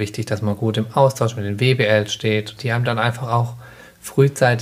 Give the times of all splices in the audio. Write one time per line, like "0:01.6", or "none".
0:02.6